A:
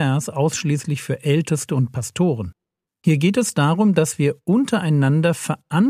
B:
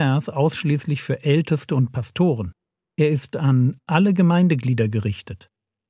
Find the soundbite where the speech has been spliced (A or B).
A